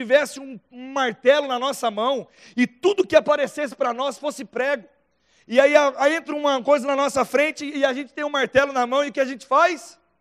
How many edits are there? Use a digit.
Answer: 0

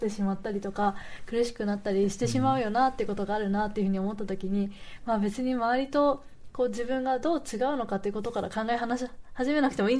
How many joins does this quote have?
0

